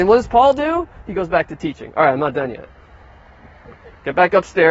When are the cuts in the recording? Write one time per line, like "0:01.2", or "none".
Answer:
none